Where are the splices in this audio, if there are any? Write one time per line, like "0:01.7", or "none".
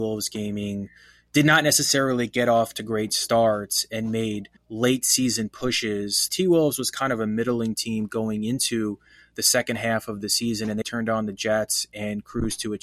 0:04.6
0:06.3
0:10.8